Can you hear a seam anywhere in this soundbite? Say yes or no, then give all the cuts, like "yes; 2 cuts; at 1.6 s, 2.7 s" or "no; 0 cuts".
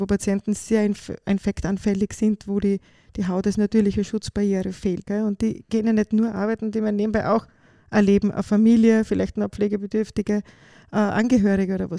yes; 1 cut; at 5.0 s